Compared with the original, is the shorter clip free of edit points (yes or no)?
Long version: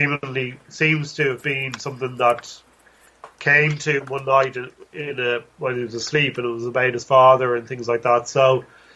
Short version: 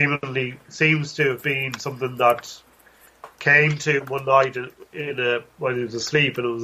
yes